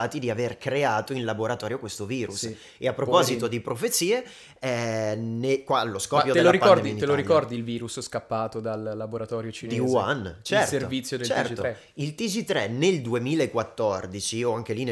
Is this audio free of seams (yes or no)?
yes